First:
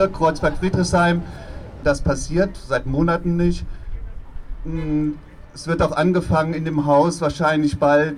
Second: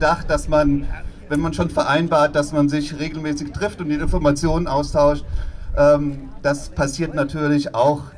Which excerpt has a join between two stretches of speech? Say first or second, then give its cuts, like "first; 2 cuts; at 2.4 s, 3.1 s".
first; 1 cut; at 1.8 s